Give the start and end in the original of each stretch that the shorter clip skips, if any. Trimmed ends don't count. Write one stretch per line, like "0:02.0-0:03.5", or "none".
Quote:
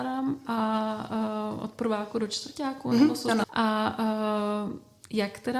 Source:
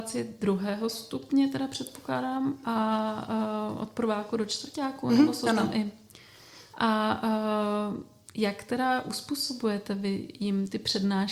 0:05.6-0:06.7

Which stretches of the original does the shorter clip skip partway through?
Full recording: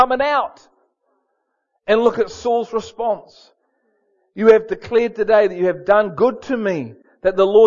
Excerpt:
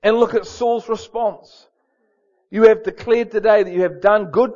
none

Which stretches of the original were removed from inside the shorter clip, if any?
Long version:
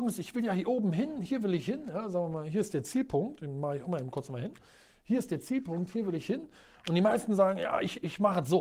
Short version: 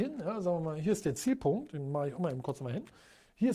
none

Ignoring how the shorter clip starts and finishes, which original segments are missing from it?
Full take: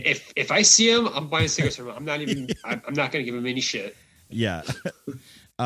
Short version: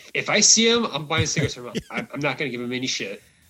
0:01.9-0:02.5

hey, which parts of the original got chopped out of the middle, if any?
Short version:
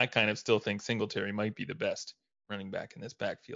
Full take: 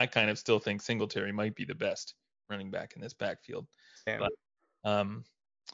none

